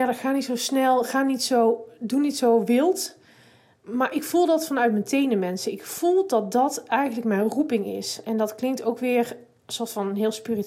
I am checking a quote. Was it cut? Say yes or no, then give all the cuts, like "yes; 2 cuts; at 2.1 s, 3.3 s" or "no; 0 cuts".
no; 0 cuts